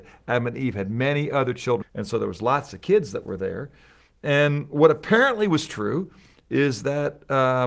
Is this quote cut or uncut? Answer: cut